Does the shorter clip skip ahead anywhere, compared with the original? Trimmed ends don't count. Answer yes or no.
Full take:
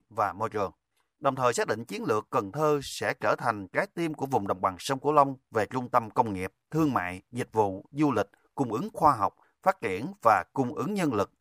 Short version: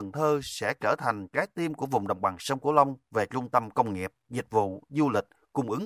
yes